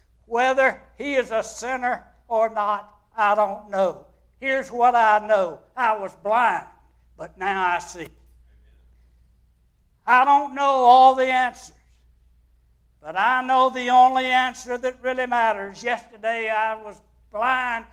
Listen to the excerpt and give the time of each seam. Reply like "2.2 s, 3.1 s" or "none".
none